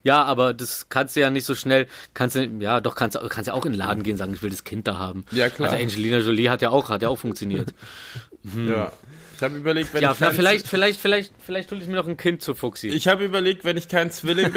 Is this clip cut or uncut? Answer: uncut